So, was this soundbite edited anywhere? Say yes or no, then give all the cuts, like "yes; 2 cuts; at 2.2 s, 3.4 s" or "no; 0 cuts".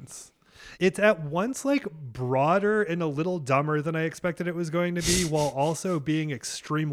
no; 0 cuts